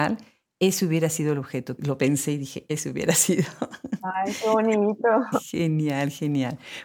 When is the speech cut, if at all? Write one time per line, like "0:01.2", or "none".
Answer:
0:02.7